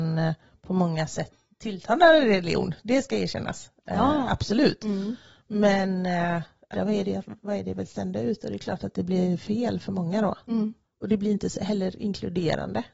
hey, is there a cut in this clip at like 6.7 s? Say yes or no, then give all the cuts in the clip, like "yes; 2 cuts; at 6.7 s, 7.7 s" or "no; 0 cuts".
yes; 1 cut; at 6.7 s